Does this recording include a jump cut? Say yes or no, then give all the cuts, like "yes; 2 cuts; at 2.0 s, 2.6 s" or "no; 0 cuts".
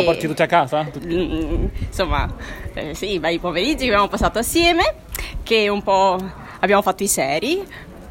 yes; 1 cut; at 1.0 s